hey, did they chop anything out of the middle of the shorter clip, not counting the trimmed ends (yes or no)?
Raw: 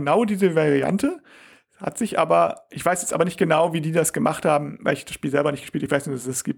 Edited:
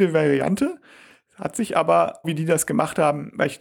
yes